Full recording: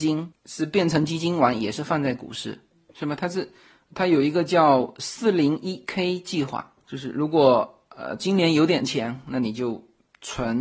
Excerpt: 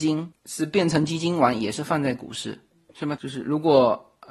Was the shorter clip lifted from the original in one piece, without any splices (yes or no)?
no